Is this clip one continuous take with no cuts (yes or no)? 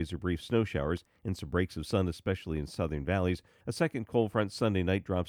no